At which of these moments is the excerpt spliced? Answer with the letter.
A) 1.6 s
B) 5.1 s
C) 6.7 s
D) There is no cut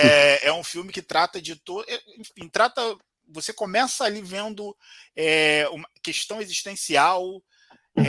D